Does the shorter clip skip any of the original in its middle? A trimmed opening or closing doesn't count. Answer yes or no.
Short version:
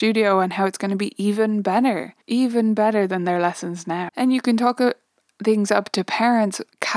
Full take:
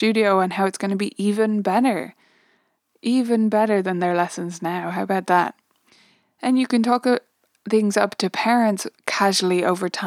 yes